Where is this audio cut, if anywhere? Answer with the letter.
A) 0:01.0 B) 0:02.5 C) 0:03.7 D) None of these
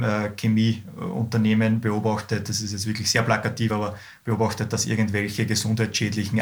D